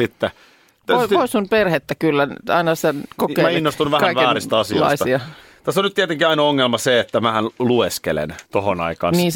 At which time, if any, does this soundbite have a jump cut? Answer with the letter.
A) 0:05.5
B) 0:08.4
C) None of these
B